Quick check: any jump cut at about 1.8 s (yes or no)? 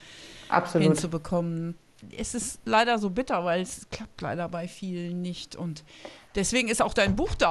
no